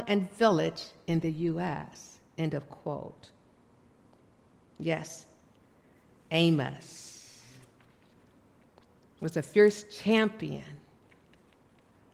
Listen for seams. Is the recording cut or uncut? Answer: cut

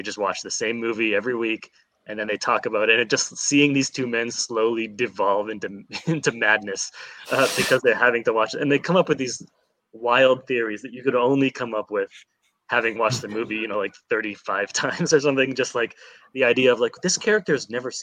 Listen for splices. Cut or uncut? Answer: uncut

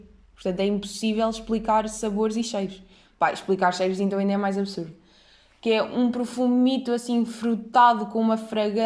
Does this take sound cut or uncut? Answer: uncut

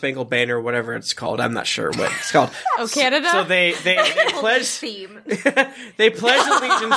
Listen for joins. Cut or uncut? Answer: uncut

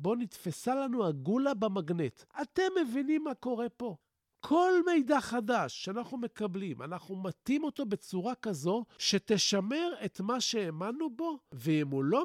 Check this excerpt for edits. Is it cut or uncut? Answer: uncut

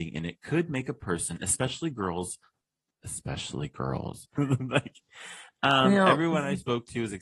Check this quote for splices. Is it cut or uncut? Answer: cut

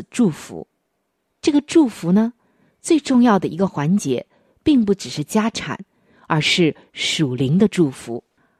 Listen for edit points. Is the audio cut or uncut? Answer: uncut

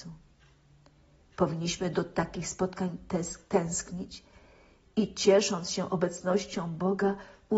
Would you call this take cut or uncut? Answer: cut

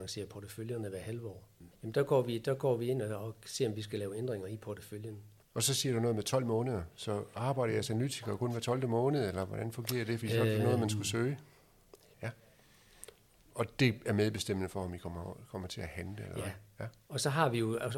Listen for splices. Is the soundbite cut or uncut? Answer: cut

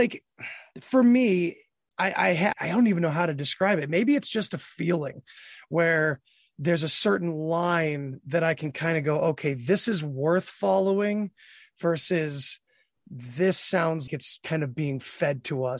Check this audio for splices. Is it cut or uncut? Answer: cut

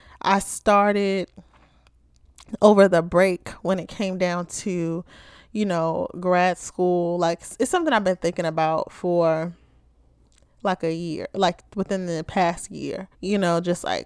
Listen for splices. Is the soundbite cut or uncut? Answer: cut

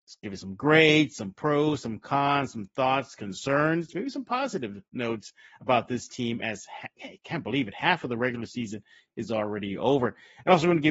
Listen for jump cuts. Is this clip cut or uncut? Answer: uncut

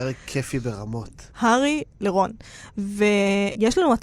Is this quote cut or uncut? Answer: cut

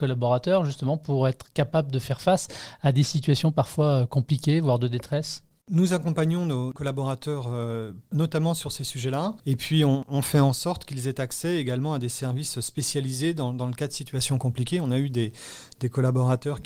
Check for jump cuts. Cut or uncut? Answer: cut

